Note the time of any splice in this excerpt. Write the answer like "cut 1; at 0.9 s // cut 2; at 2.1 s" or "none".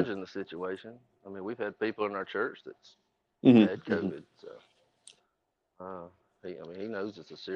none